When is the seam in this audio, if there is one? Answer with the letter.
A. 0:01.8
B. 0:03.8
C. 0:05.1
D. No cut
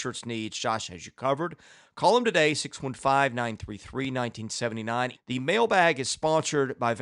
C